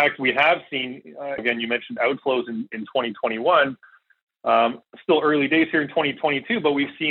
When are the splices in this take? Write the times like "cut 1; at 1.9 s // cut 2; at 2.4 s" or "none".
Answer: cut 1; at 1.4 s